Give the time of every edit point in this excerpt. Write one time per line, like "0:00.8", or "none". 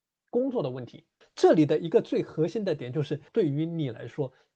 0:01.2
0:03.3